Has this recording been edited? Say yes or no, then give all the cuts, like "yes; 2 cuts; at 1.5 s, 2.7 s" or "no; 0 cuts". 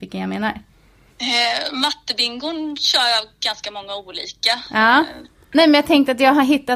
yes; 1 cut; at 5.5 s